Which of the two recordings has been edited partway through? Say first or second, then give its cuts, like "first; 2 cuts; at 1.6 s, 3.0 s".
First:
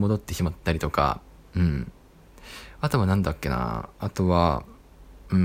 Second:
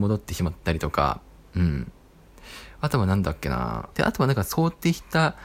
second; 1 cut; at 3.9 s